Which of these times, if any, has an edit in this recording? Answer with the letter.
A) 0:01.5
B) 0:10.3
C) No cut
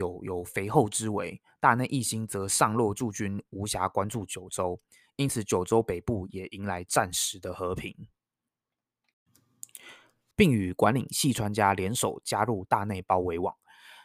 B